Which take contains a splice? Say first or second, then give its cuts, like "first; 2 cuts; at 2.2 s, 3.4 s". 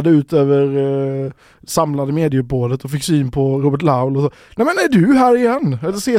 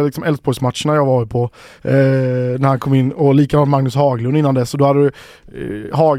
second; 1 cut; at 1.8 s